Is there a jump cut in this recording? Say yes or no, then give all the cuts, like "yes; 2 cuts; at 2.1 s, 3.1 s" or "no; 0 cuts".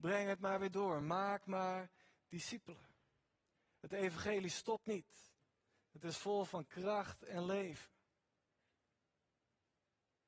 no; 0 cuts